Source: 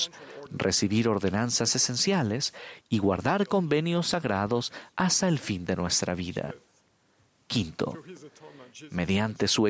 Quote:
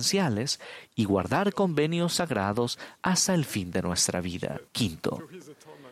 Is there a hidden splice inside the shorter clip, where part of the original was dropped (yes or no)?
yes